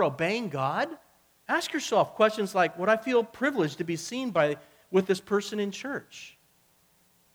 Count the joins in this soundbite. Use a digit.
1